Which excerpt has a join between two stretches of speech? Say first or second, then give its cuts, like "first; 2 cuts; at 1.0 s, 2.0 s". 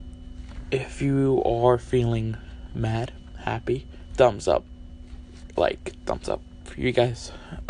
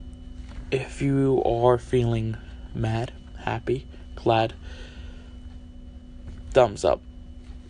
first; 1 cut; at 4.1 s